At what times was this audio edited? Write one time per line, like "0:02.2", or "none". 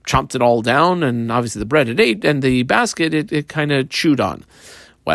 none